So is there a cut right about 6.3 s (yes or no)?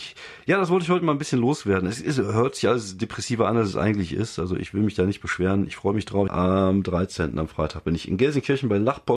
yes